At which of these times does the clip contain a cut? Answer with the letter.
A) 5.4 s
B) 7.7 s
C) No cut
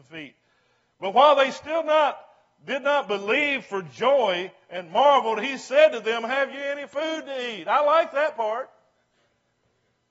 C